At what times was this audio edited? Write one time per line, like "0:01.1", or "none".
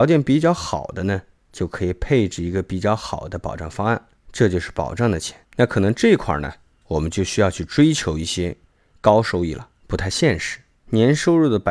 0:05.4
0:09.8